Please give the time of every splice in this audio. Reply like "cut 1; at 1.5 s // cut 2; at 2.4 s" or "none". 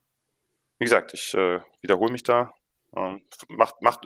none